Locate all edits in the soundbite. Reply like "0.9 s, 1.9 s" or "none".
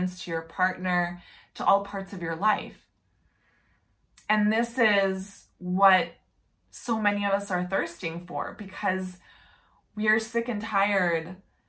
none